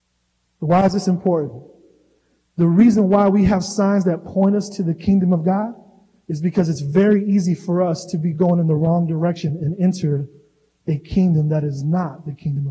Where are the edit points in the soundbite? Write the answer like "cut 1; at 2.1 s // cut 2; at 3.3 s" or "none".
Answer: none